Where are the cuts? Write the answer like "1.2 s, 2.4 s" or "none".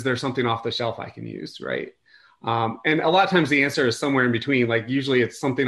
none